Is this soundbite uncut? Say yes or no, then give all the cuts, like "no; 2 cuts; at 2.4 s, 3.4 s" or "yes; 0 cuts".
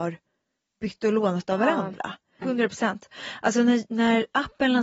no; 1 cut; at 2.4 s